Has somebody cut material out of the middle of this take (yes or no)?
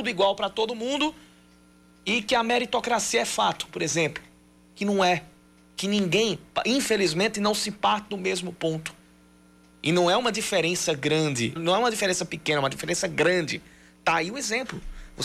yes